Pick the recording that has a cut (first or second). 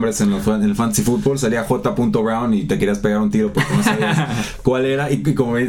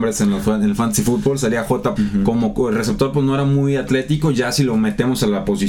second